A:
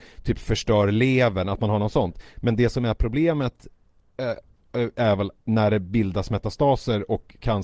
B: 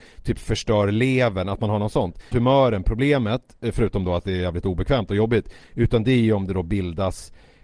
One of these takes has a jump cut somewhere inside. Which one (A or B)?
B